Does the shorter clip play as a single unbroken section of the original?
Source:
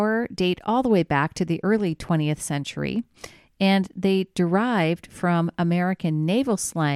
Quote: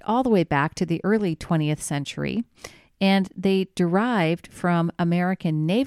yes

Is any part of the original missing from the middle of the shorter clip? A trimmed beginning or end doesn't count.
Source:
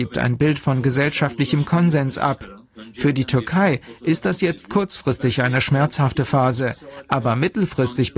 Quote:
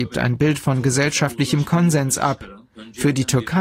no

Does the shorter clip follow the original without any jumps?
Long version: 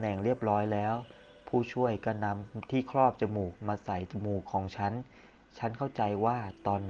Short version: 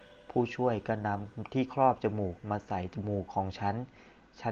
yes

